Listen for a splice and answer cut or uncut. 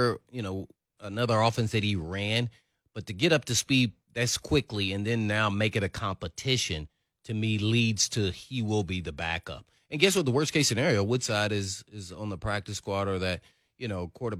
uncut